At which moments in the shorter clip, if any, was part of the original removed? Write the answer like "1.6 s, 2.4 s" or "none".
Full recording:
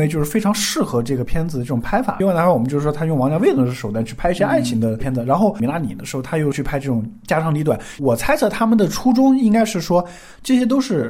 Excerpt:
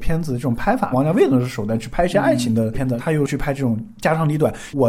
0.9 s, 3.0 s